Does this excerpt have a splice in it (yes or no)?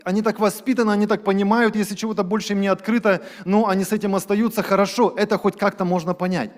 no